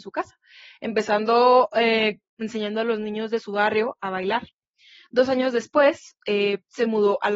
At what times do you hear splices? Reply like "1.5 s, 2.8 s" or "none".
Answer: 4.0 s, 6.2 s

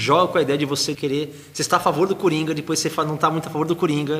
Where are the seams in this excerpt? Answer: 0.9 s

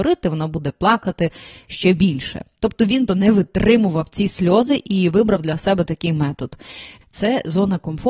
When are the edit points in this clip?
3.1 s, 7.0 s

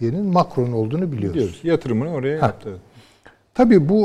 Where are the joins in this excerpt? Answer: none

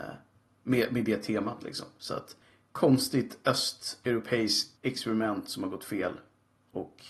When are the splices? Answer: 4.8 s

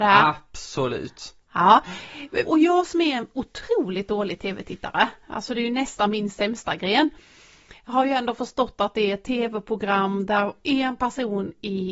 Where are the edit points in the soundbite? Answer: 2.4 s

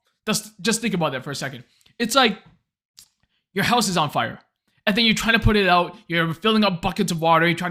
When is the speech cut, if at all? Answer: none

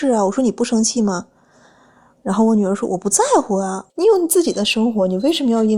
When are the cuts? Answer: 3.9 s

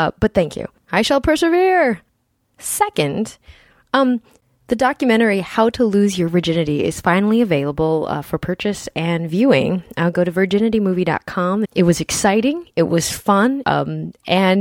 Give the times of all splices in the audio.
11.6 s, 13.6 s

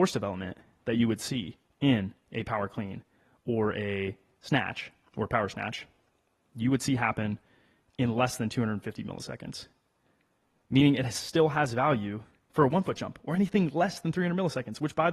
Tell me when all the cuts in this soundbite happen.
none

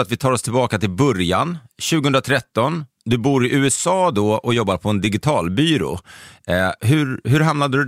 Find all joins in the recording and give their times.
6.8 s

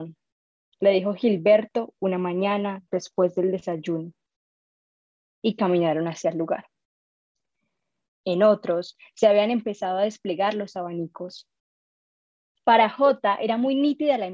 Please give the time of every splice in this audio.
8.1 s

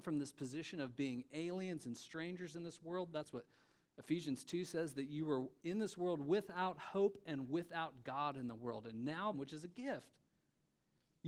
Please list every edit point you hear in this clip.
9.3 s

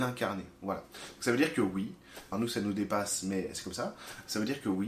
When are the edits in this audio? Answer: 2.3 s

